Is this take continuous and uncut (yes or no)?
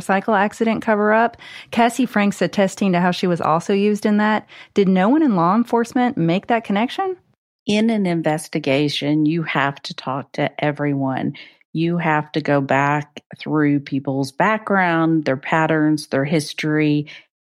yes